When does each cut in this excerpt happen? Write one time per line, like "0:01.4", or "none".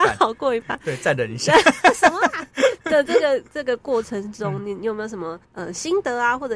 0:05.4